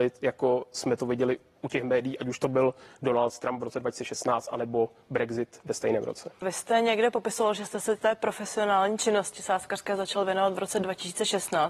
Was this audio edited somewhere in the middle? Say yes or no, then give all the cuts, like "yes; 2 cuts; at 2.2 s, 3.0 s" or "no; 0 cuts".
yes; 1 cut; at 6.4 s